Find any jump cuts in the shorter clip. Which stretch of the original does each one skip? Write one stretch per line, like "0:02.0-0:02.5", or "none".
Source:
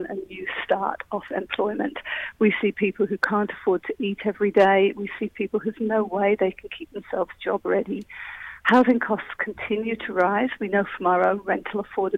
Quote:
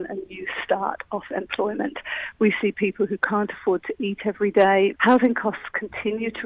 0:04.9-0:08.6